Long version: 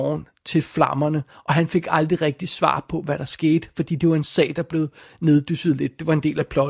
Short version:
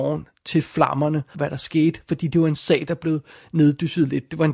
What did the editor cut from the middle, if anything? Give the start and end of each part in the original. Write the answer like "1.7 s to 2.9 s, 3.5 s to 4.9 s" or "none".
1.3 s to 3.0 s